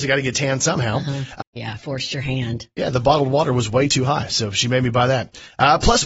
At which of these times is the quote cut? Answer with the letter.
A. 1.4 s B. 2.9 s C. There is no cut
A